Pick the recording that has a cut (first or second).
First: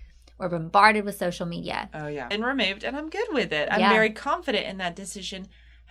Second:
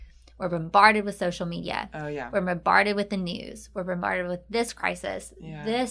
first